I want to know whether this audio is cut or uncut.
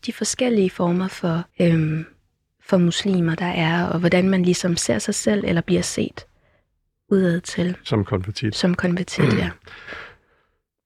cut